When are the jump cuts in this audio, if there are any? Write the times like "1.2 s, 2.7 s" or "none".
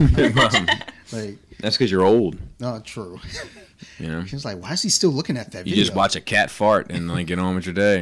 none